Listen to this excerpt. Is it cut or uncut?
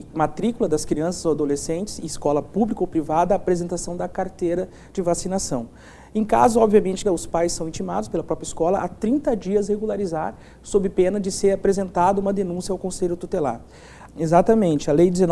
cut